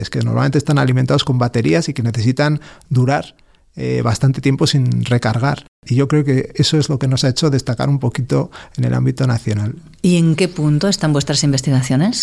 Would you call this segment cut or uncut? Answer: uncut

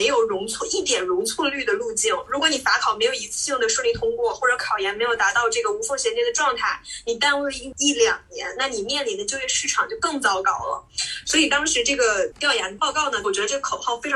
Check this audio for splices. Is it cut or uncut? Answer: cut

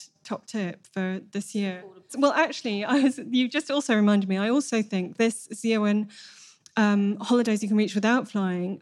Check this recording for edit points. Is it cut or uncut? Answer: cut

